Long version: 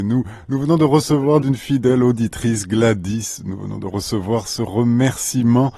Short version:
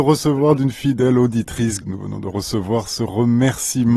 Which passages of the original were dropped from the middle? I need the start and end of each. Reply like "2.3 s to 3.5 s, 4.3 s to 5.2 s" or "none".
2.6 s to 3.4 s